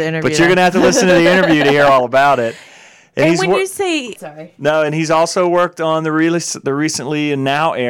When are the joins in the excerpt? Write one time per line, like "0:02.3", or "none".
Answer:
0:04.2